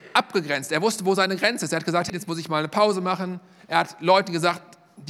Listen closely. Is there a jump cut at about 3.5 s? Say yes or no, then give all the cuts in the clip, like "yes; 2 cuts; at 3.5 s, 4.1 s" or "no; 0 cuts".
no; 1 cut; at 2.1 s